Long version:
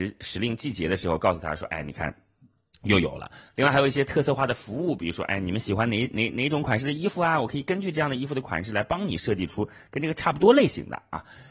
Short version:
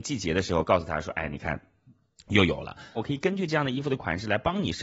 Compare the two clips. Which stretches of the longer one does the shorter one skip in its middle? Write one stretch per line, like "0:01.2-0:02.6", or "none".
0:03.5-0:07.4

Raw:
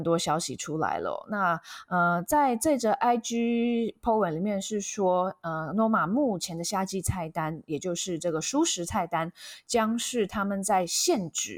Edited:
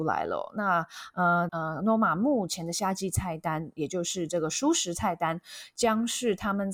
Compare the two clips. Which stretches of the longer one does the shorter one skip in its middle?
0:02.2-0:05.4

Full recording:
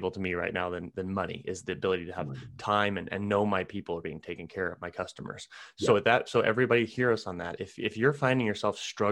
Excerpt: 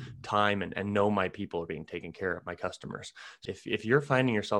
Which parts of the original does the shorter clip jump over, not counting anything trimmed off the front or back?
0:05.8-0:07.6

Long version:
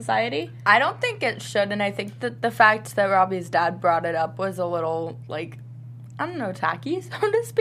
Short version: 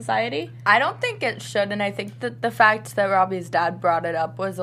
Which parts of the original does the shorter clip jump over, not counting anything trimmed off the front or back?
none

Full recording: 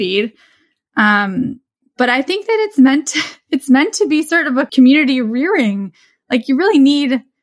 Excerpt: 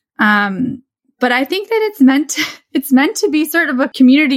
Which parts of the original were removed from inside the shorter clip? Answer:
none

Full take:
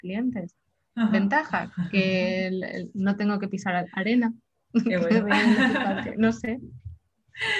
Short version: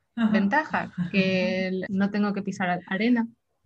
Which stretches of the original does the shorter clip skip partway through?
0:02.7-0:02.9

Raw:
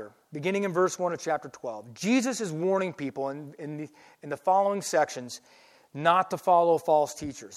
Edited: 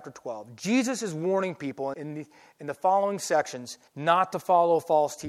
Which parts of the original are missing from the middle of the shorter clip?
0:03.3-0:03.6
0:05.5-0:05.9

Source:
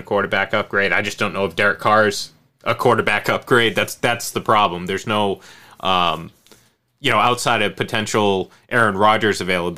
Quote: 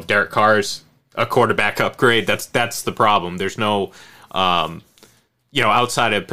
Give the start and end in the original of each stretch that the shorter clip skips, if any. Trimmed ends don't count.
none

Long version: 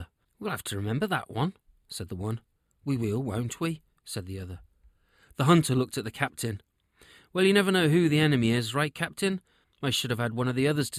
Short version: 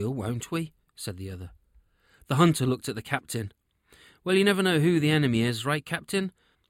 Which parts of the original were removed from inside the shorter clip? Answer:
none

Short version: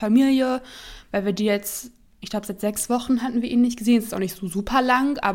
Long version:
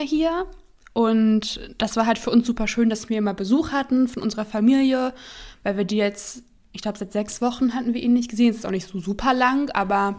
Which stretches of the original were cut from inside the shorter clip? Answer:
none

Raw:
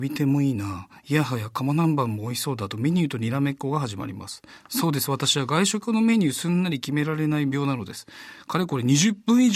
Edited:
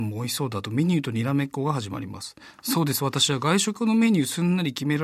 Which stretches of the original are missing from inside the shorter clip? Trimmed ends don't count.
none

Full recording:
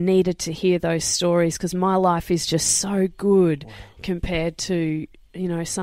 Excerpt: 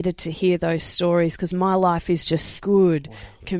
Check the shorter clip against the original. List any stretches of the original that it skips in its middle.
0:02.8-0:03.1

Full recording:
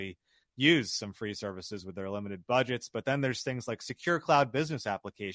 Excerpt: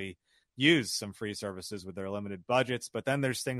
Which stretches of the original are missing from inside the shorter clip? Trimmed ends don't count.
none

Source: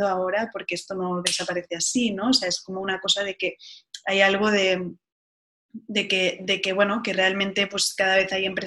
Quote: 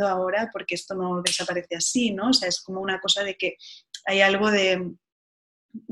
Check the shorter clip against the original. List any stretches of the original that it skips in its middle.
none

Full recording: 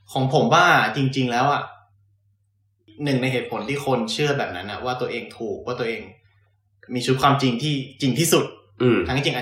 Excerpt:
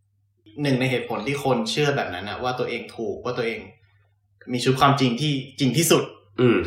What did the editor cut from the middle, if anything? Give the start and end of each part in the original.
none

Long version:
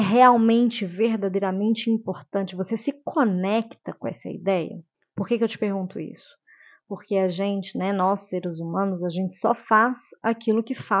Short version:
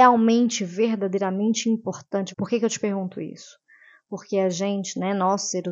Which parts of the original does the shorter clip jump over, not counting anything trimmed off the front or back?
0:02.5-0:05.1

